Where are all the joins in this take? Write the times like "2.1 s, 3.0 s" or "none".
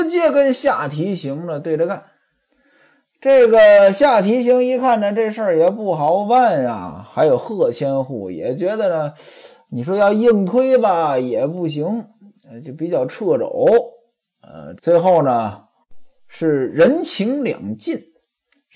14.8 s